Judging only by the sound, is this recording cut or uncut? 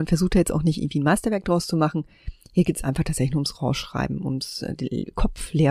uncut